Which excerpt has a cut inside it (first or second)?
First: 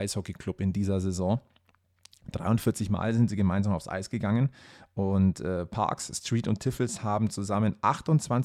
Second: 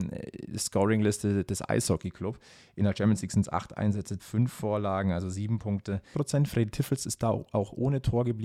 second